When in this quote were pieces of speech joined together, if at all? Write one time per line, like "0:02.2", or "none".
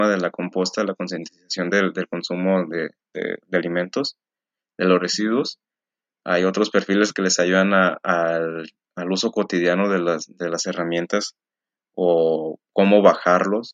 none